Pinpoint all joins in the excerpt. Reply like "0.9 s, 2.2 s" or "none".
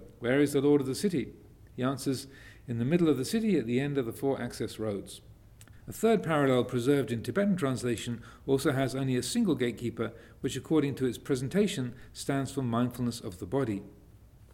5.7 s